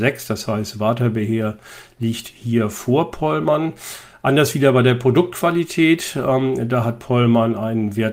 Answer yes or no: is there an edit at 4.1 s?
no